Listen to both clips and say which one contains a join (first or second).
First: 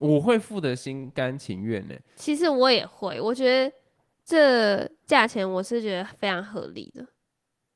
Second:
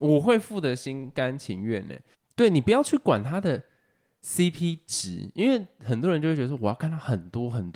second